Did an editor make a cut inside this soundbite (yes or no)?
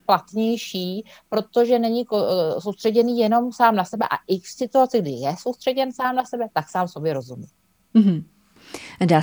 no